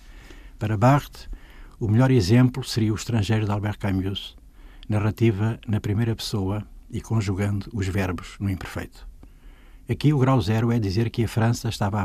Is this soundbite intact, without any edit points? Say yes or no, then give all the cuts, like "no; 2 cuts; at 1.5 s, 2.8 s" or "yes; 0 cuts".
yes; 0 cuts